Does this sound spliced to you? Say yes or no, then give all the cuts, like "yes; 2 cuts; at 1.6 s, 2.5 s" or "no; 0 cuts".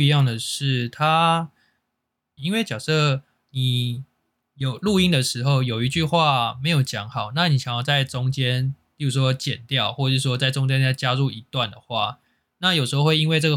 yes; 1 cut; at 2.4 s